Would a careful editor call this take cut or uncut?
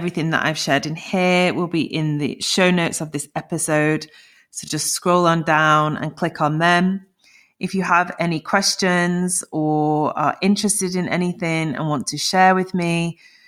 uncut